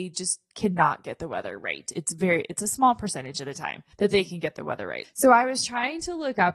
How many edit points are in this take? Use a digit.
2